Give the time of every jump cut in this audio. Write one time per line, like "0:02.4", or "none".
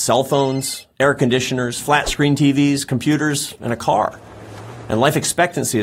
none